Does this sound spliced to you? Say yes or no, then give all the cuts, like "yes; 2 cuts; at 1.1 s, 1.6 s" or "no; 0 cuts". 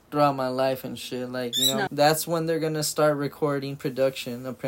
yes; 1 cut; at 1.9 s